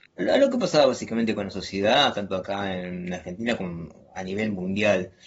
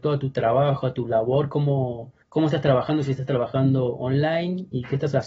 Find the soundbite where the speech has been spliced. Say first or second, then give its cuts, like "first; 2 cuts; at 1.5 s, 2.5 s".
second; 1 cut; at 2.2 s